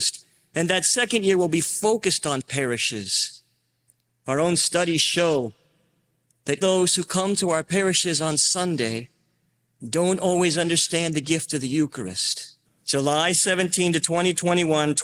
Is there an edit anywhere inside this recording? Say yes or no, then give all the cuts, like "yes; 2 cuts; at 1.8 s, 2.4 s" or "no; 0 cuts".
yes; 2 cuts; at 6.6 s, 12.6 s